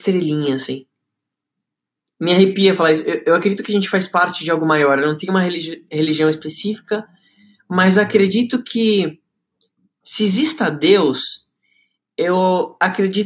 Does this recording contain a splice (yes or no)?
no